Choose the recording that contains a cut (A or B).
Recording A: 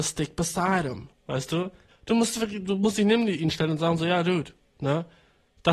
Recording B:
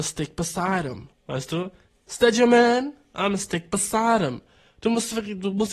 A